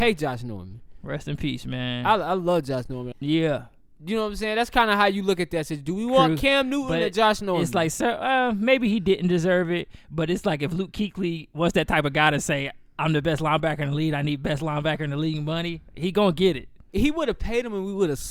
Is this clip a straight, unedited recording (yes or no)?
no